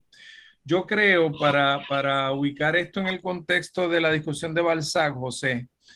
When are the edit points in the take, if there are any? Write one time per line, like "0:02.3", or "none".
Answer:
none

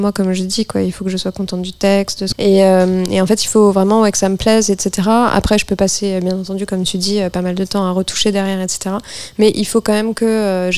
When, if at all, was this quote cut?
0:02.3

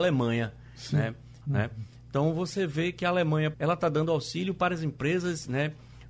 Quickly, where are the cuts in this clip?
0:01.4
0:03.5

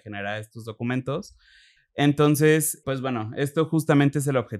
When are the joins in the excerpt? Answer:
0:01.8
0:02.8

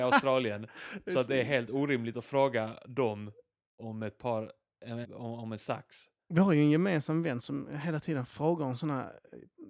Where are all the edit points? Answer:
0:05.0

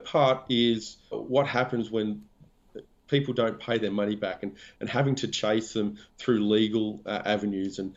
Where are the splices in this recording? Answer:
0:01.1

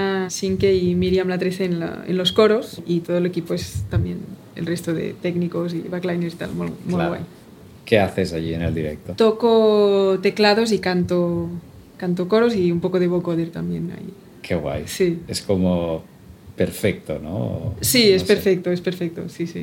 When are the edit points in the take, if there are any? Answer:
none

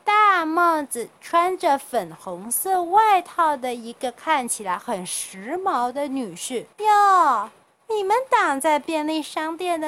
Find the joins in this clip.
0:06.7

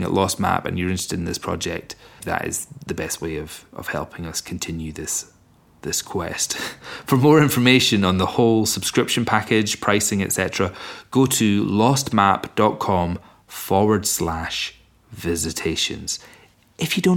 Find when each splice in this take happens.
0:02.2

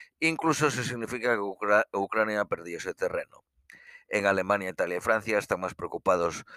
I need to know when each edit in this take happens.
none

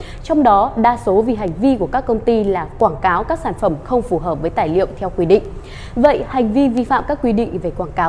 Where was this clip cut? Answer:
none

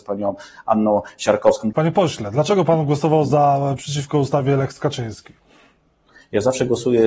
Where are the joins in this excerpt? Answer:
0:01.7

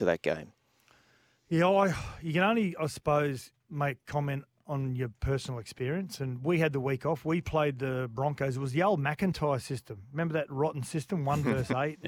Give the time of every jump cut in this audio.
none

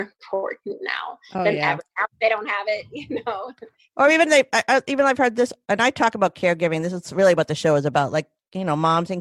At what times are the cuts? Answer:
none

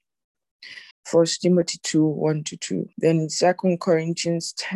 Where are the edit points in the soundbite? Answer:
0:00.9
0:02.9

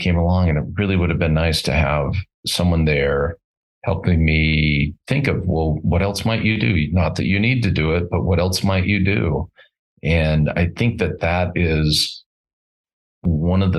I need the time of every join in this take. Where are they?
0:05.0

